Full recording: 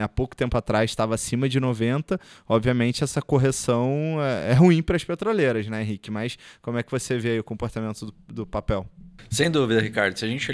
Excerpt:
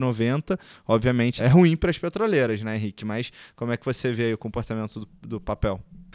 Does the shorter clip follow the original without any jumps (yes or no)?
no